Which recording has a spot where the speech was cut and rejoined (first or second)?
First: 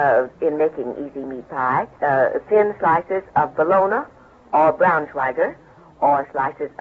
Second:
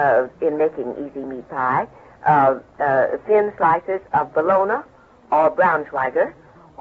first